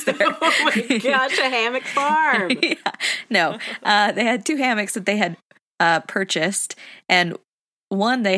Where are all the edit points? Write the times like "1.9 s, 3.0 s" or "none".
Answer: none